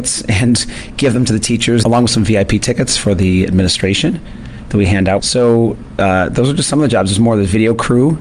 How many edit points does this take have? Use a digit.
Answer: 2